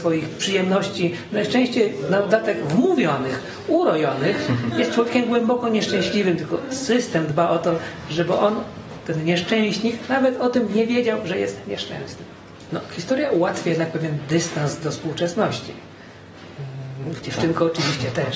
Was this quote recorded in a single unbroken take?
no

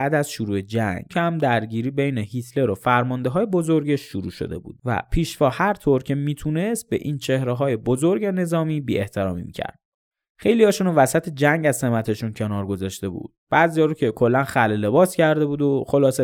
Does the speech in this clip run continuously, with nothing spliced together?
no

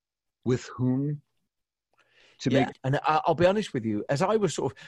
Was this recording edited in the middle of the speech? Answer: yes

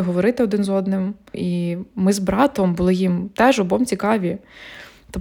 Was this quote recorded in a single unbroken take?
no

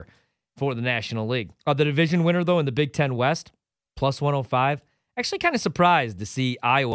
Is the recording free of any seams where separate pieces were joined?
no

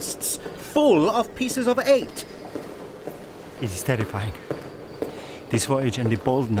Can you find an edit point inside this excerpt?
yes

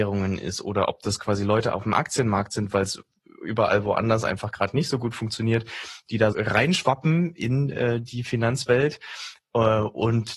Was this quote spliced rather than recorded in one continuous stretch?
yes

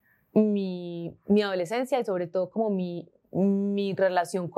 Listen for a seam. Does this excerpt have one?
no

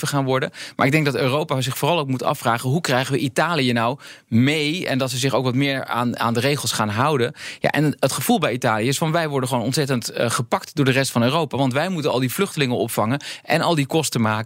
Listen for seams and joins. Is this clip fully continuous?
yes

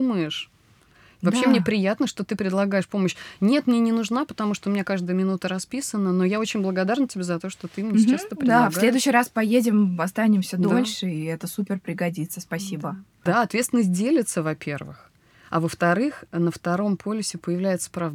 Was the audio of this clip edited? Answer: yes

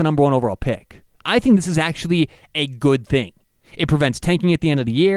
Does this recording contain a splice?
no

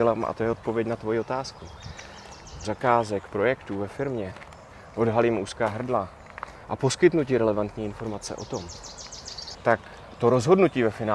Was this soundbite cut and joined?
yes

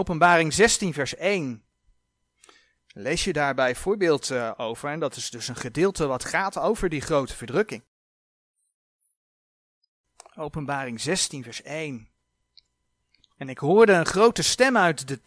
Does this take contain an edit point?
no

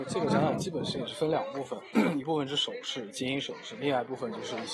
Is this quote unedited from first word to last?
yes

